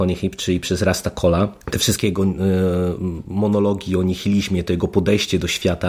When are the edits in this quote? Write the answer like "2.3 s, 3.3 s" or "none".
1.6 s